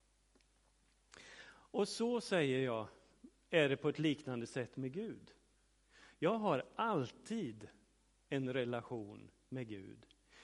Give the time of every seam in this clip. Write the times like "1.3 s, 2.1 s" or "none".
none